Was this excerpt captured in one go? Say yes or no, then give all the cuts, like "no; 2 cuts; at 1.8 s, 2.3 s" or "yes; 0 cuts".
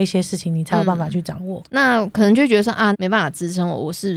no; 2 cuts; at 1.6 s, 2.9 s